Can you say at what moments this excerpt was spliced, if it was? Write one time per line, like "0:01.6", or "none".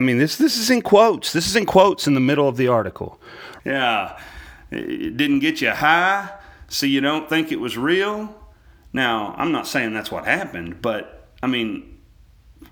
0:03.6